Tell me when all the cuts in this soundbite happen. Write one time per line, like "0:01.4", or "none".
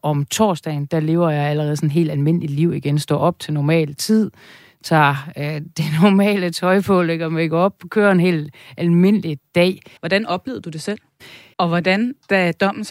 0:10.0
0:11.5